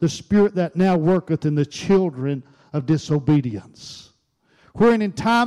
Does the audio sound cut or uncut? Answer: uncut